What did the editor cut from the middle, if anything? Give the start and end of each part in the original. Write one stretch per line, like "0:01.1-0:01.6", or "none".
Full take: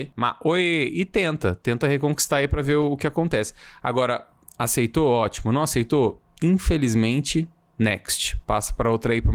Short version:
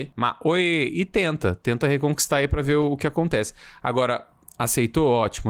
none